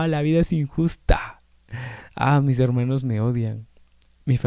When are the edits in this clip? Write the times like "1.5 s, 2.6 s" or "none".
none